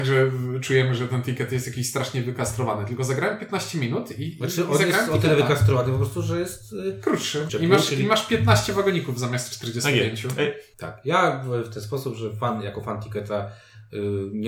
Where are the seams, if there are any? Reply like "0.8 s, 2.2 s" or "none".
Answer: 7.5 s, 10.7 s